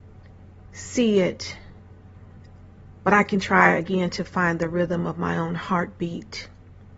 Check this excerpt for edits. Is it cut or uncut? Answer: uncut